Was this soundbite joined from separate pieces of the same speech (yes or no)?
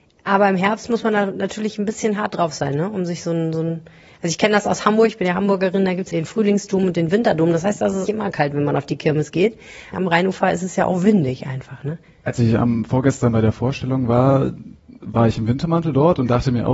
yes